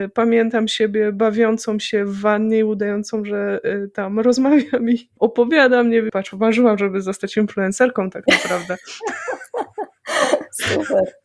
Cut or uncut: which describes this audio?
cut